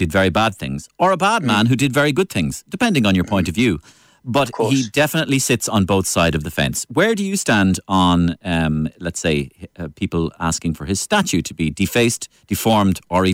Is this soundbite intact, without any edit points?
yes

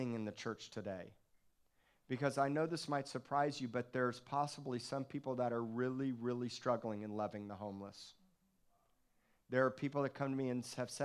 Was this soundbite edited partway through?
no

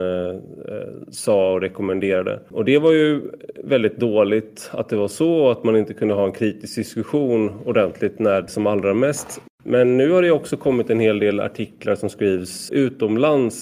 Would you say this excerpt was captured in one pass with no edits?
no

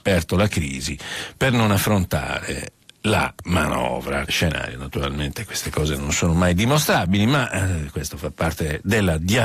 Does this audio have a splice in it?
yes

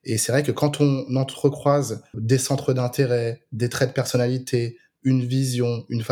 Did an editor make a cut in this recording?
yes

